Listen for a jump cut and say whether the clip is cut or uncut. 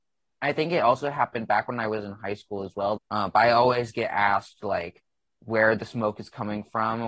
cut